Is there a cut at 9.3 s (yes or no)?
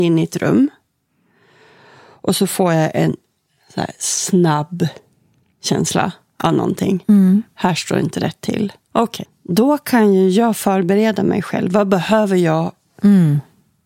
yes